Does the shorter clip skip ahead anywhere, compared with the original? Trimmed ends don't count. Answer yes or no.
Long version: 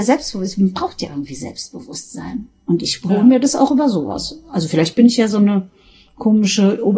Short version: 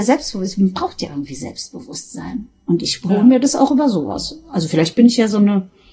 no